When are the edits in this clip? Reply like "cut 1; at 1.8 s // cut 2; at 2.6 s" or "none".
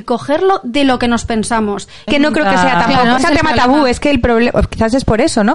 cut 1; at 2.1 s // cut 2; at 3.2 s